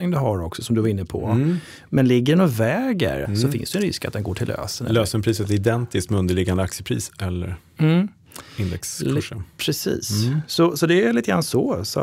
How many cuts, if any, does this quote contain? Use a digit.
1